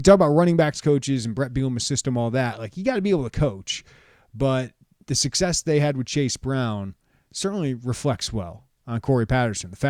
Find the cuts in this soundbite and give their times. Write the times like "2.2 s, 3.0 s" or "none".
none